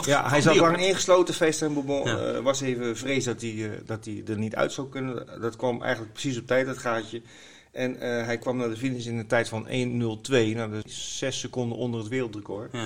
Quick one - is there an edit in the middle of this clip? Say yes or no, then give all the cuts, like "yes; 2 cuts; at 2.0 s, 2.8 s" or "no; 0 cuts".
no; 0 cuts